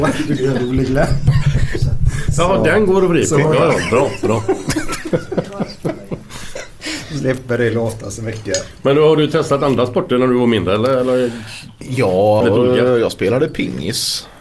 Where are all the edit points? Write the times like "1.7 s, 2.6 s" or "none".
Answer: 12.4 s